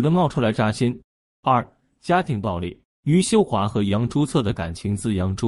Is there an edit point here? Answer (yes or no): no